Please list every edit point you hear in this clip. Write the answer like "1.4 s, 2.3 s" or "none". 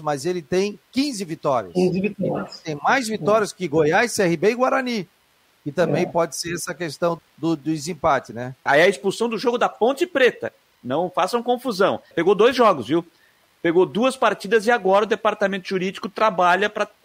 7.2 s, 8.7 s, 12.1 s

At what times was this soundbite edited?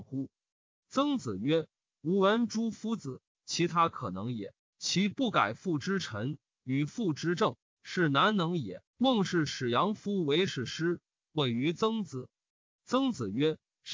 3.3 s, 8.9 s

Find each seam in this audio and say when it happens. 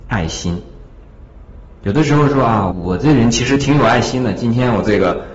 2.7 s

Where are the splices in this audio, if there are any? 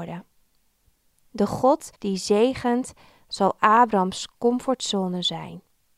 1.9 s

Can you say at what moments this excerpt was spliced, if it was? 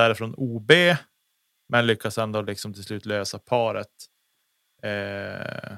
none

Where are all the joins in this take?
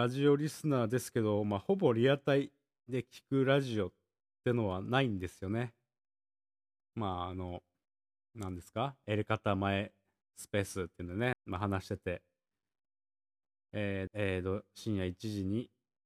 6.7 s, 11.3 s, 14.1 s

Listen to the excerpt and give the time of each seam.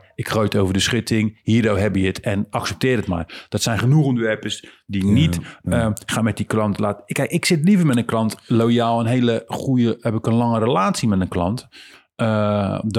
none

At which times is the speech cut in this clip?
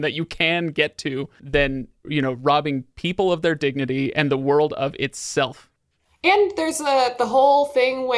1.4 s

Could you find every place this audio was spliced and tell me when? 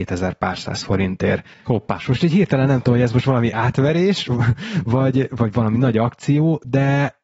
none

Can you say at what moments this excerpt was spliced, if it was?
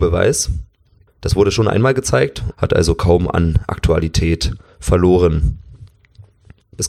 1.1 s, 2.5 s

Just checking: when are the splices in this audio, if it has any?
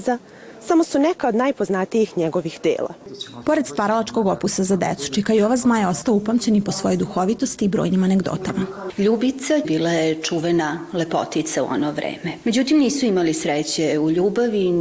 9.6 s, 12.4 s

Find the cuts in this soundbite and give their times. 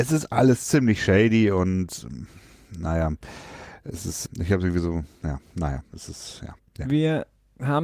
4.3 s, 6.6 s

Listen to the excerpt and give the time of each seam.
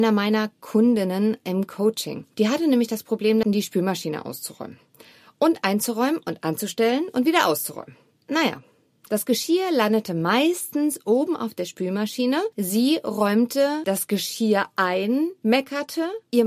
3.4 s

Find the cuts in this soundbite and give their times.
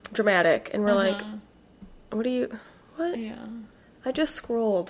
none

